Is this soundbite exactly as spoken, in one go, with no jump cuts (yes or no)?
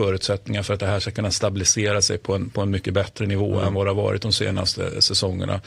yes